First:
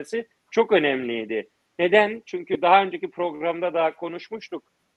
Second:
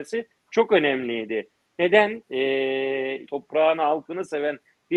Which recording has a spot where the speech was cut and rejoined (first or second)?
second